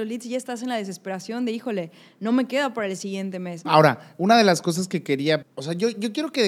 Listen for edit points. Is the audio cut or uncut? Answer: cut